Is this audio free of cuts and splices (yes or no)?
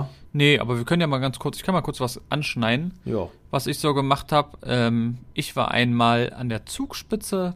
yes